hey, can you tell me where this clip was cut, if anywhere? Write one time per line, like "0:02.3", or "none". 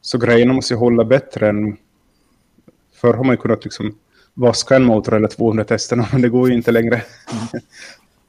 none

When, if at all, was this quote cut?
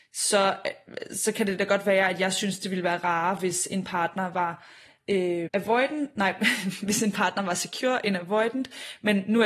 0:05.5

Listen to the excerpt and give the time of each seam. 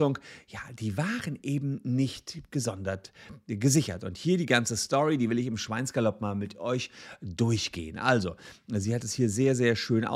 none

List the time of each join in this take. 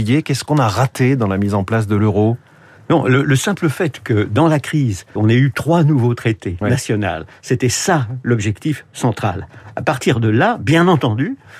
0:05.2
0:06.6

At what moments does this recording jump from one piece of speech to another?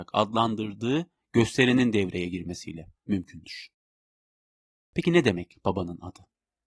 none

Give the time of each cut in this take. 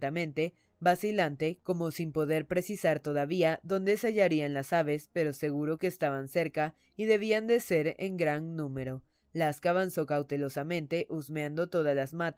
none

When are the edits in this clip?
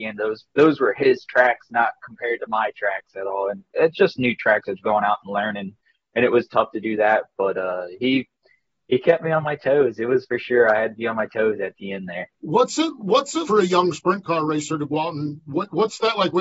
0:12.3
0:13.4

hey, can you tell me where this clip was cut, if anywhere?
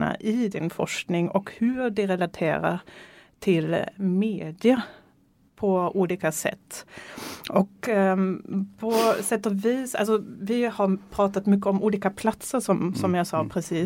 none

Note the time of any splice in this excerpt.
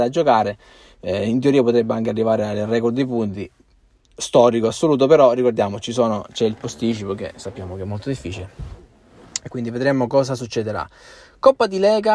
none

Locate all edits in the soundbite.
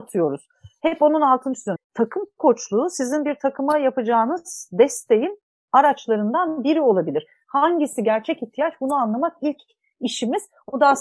0:01.8

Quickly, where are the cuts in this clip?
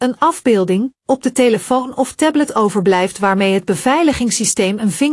none

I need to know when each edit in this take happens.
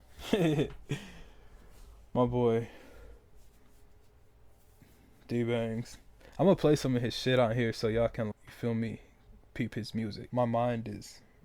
0:08.3
0:10.3

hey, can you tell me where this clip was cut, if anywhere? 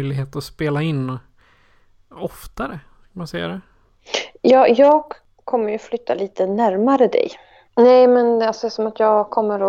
0:07.7

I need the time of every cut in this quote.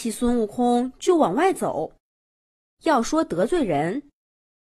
0:02.8

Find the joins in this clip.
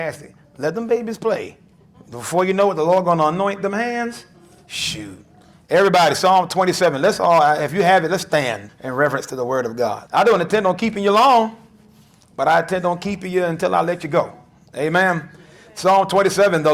0:08.7
0:10.1

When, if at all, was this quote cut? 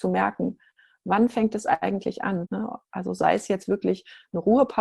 0:02.5

